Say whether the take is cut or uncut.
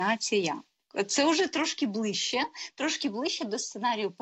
uncut